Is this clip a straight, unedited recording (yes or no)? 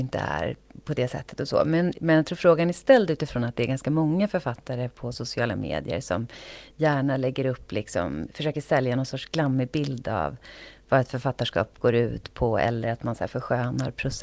yes